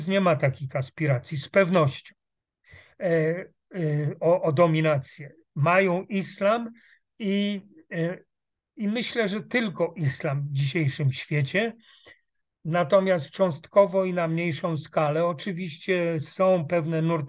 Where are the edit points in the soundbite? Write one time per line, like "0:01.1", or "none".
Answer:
none